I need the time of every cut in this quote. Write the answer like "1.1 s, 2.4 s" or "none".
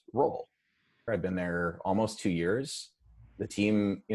1.1 s